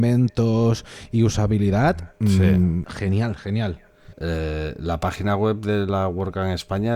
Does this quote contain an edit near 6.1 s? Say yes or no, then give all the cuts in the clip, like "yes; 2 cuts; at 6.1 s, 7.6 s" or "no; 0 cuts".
no; 2 cuts; at 2.8 s, 4.1 s